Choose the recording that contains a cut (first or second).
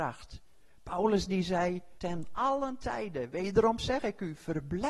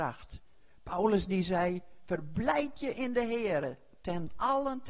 first